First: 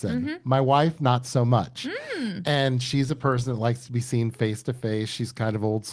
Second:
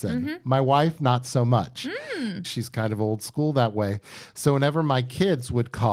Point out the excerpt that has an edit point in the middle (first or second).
second